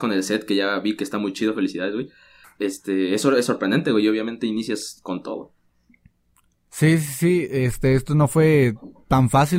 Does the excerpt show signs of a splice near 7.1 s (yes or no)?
no